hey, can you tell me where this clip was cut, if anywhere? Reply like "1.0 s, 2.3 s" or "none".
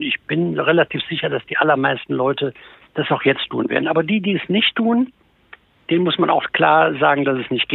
none